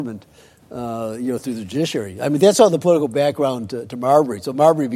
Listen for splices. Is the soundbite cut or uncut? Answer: uncut